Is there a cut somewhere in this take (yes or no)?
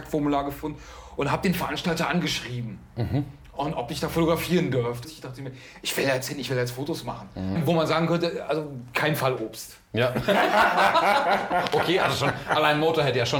yes